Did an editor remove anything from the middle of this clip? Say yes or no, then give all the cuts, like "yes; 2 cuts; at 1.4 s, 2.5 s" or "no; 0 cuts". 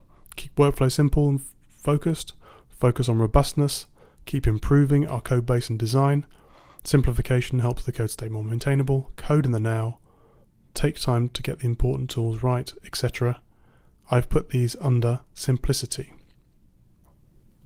yes; 1 cut; at 10.7 s